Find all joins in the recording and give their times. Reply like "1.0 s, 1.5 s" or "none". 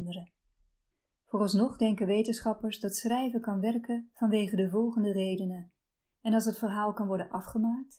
1.1 s, 6.1 s

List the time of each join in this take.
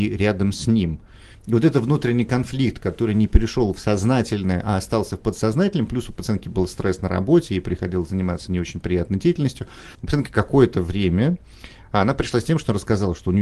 1.3 s, 9.9 s

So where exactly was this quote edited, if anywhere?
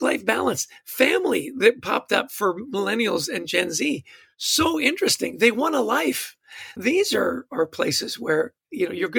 6.8 s

